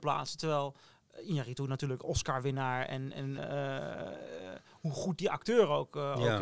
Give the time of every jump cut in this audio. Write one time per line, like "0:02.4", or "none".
0:03.4